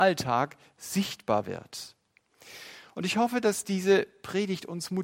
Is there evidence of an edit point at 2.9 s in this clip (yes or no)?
no